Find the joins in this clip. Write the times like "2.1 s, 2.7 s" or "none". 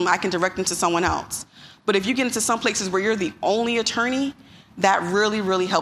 none